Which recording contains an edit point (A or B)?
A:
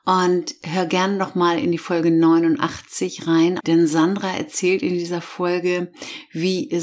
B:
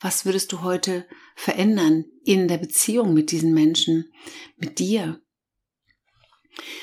A